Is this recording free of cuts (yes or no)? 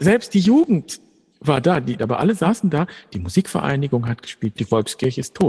no